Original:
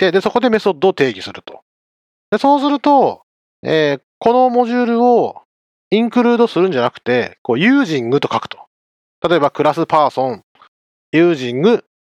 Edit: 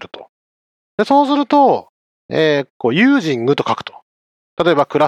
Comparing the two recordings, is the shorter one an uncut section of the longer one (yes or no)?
no